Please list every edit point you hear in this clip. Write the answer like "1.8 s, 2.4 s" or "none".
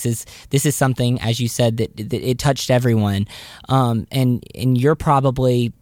none